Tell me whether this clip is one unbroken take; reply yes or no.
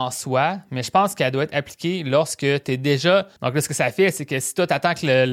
no